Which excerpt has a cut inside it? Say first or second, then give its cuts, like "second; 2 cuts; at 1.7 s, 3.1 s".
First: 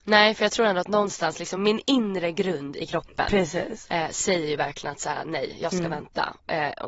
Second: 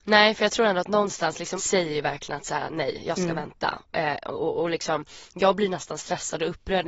second; 1 cut; at 1.6 s